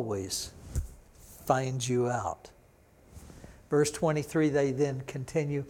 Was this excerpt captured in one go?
yes; 0 cuts

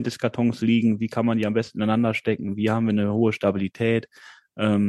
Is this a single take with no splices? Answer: yes; 0 cuts

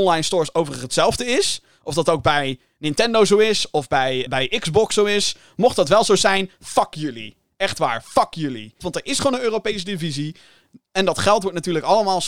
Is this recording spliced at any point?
yes; 2 cuts; at 4.3 s, 8.8 s

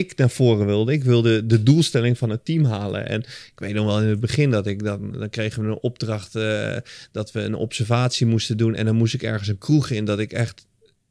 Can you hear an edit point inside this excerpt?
no; 0 cuts

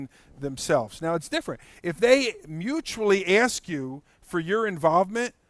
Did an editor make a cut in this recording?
no; 0 cuts

